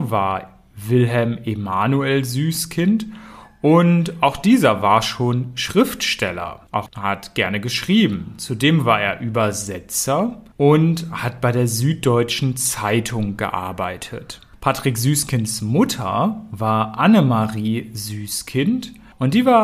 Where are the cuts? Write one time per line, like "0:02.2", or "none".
0:06.9